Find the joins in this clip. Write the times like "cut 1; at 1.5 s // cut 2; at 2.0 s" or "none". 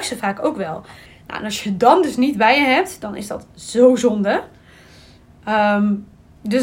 cut 1; at 1.1 s